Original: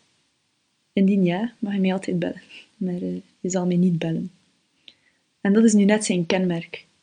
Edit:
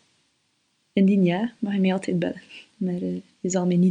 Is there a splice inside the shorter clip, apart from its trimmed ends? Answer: no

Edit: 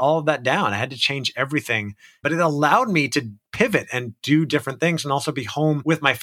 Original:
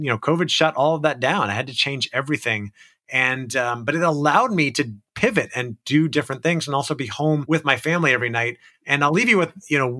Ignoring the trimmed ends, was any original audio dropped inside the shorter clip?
yes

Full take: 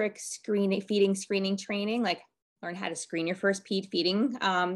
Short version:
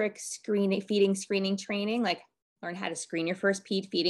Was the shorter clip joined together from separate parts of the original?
no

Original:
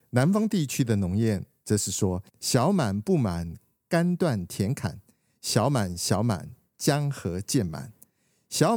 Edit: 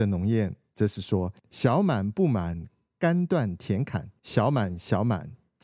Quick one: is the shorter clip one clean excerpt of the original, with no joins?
no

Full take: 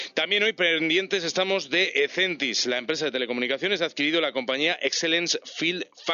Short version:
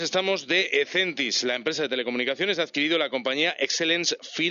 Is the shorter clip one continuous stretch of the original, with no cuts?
yes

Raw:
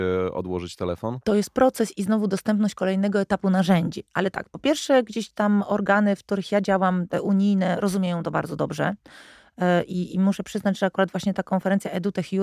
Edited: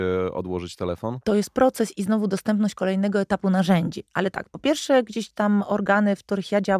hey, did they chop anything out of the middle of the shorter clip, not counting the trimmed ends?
no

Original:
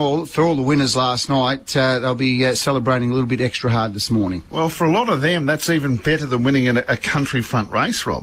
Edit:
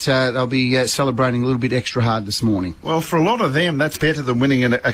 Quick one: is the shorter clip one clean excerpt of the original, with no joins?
no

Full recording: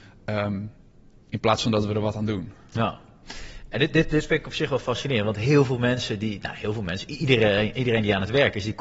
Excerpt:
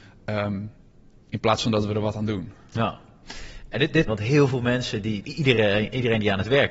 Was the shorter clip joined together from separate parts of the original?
yes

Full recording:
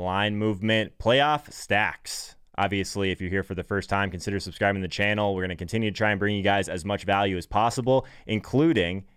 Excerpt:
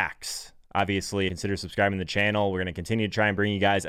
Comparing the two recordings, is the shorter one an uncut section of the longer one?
no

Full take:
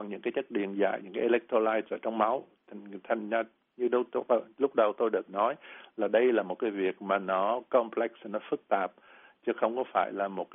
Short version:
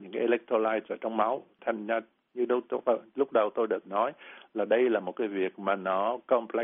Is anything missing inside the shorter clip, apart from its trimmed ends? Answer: yes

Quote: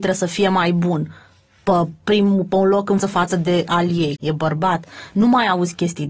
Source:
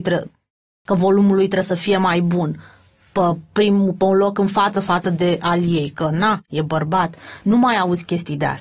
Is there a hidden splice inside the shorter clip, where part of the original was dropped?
yes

